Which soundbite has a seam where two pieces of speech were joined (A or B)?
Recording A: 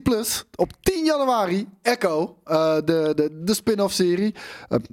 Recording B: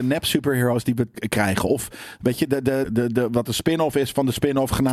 B